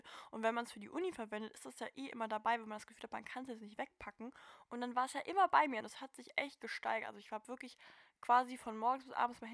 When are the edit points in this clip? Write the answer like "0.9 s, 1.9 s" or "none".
5.8 s